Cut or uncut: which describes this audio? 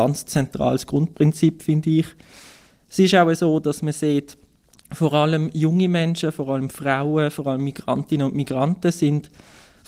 uncut